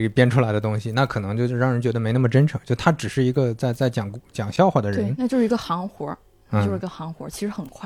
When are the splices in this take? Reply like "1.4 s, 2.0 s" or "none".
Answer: none